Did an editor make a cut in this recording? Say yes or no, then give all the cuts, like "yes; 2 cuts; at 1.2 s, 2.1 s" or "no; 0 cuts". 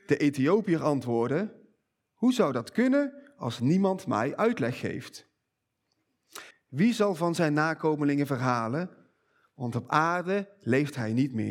yes; 1 cut; at 6.5 s